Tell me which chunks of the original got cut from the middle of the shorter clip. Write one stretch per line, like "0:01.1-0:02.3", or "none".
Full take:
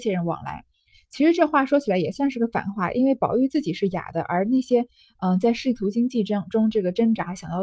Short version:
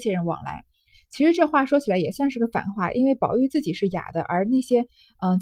none